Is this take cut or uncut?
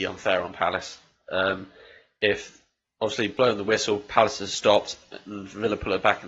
uncut